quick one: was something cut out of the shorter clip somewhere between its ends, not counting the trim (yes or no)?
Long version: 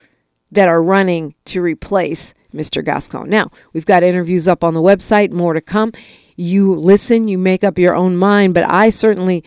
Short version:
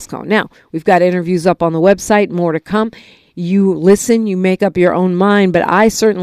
no